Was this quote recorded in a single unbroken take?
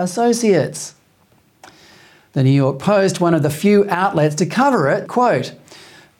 no; 2 cuts; at 2.3 s, 5.0 s

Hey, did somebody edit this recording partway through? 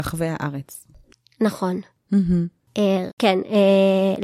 yes; 1 cut; at 3.1 s

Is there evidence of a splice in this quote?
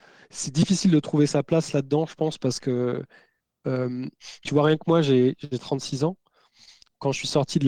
no; 0 cuts

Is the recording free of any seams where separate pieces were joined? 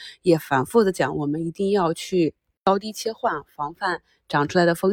yes; 0 cuts

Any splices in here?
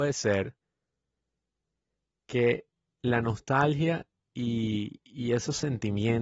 no; 0 cuts

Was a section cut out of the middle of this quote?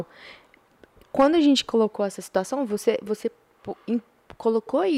no; 0 cuts

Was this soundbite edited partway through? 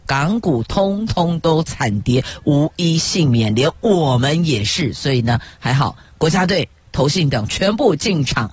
no; 0 cuts

